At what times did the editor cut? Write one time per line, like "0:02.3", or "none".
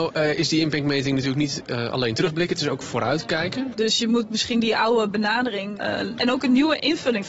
0:03.7
0:06.2